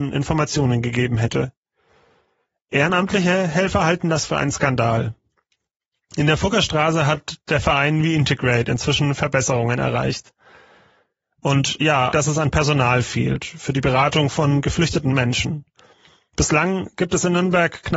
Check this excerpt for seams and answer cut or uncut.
cut